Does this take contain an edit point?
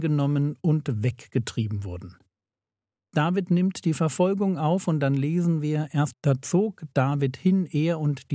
yes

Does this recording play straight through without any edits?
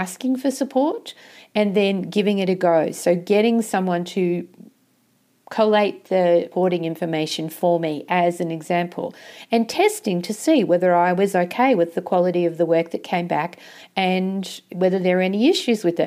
yes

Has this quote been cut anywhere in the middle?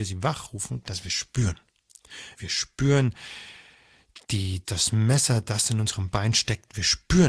yes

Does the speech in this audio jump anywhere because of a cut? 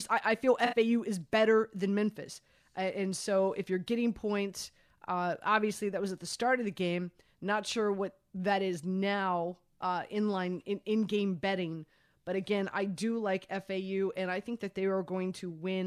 no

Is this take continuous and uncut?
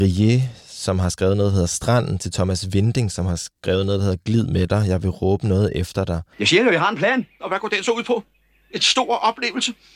no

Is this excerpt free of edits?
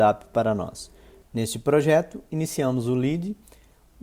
no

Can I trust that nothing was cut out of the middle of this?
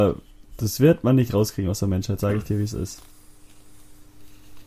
yes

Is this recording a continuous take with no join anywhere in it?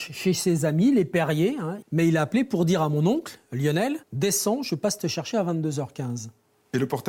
no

